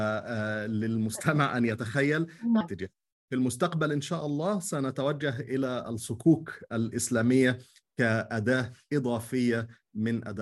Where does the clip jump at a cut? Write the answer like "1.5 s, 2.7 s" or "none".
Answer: 2.6 s